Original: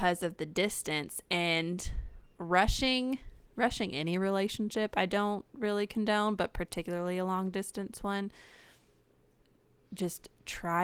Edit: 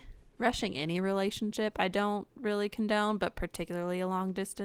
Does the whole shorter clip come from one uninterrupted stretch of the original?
yes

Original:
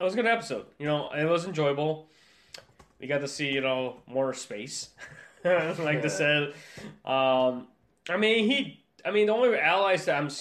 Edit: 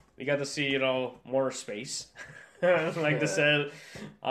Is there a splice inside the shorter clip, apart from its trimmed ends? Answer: no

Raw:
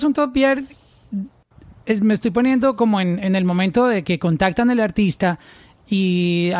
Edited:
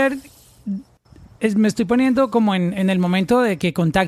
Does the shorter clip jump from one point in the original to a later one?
no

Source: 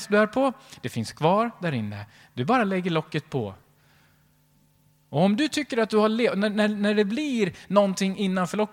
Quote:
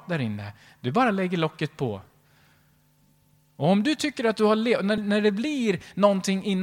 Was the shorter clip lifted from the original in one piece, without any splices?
no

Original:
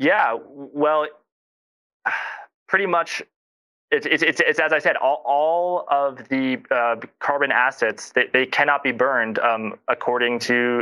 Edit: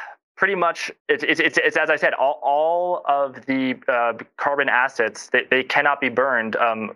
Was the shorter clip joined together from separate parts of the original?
yes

